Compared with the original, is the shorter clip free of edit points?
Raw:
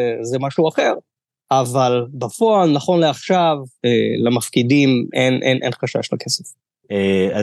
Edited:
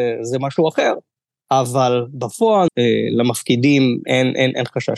no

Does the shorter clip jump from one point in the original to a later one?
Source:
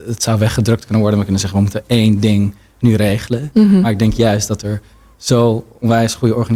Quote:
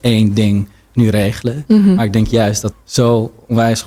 yes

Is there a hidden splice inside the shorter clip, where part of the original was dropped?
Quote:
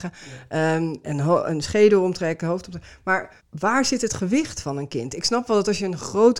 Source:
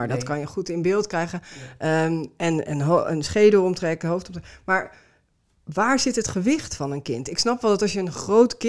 yes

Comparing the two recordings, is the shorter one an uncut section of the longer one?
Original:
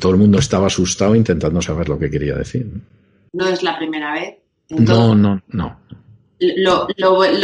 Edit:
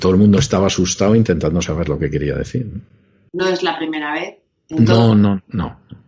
yes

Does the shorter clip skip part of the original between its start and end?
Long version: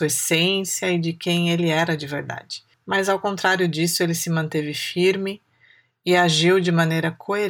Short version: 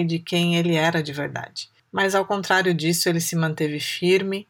no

